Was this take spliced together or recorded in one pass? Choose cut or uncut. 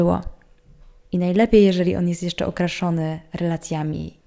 cut